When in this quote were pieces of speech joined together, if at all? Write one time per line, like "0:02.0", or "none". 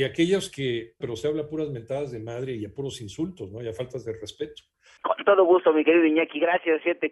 0:01.0
0:05.0